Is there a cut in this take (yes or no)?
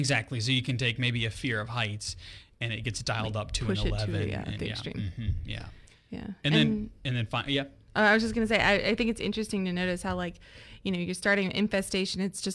no